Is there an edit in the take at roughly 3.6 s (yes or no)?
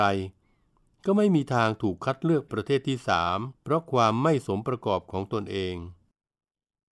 yes